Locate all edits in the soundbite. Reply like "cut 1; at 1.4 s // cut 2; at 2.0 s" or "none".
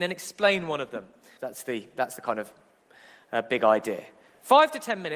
cut 1; at 1.4 s